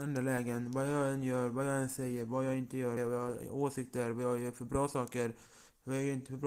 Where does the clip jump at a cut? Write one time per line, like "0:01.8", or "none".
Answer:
0:03.0

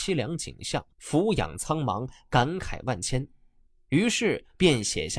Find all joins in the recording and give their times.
0:00.9

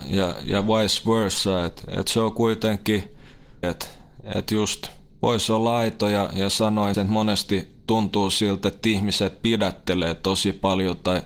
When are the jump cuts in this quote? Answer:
0:03.6
0:06.9

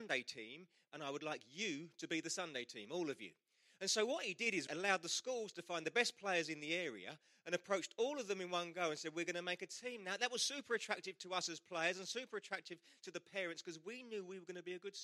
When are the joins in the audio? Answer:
0:04.7

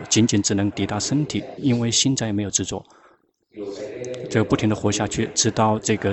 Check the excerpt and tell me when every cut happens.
0:01.6

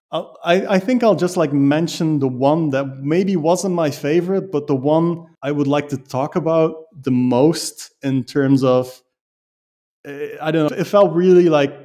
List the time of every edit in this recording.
0:05.3
0:10.7

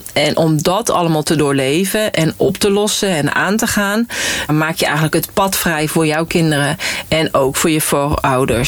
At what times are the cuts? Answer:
0:04.5

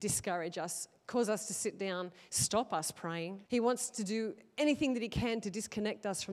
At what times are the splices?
0:02.3
0:03.5

